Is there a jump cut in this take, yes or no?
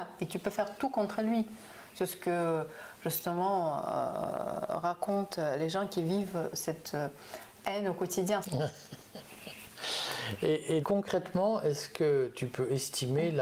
yes